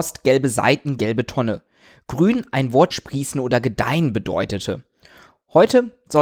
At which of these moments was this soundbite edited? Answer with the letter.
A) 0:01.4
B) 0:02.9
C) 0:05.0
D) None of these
B